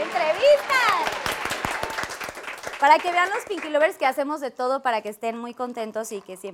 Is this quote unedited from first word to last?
yes; 0 cuts

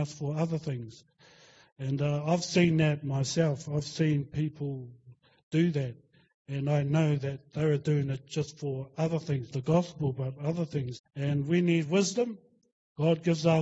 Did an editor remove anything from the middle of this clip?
yes; 2 cuts; at 9.5 s, 11.0 s

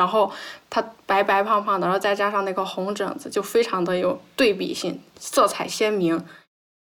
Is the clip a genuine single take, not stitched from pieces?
yes; 0 cuts

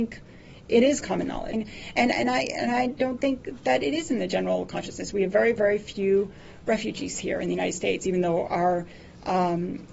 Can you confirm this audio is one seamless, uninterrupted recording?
no; 1 cut; at 1.5 s

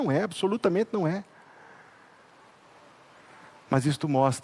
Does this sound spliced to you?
no; 0 cuts

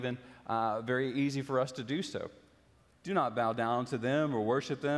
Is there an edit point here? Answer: yes; 1 cut; at 2.9 s

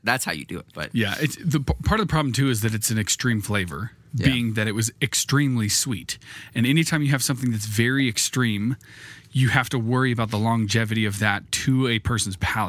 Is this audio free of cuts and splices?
yes; 0 cuts

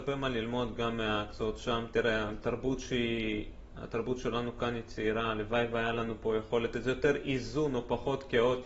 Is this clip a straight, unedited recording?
yes; 0 cuts

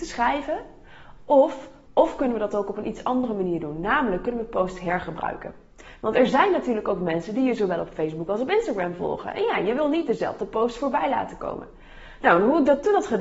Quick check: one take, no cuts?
no; 1 cut; at 1.9 s

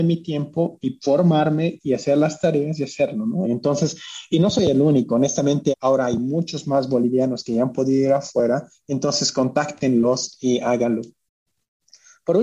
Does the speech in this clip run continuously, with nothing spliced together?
no; 2 cuts; at 3.4 s, 5.7 s

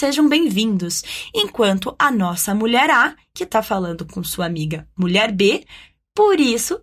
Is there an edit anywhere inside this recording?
no; 0 cuts

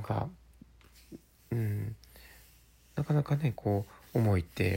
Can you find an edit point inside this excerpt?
no; 0 cuts

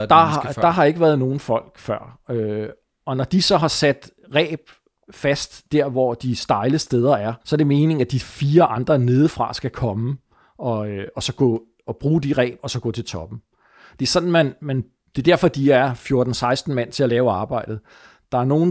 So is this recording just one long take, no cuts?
no; 1 cut; at 7.4 s

